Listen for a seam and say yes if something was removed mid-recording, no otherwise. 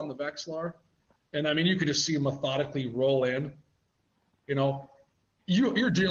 no